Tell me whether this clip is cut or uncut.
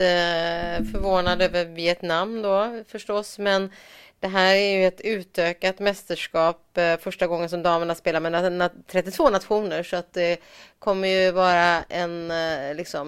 uncut